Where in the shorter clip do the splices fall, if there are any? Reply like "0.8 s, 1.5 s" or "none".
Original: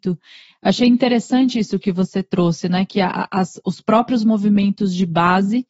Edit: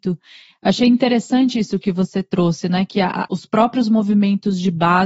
3.3 s